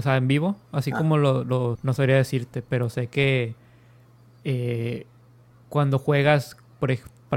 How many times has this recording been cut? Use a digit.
1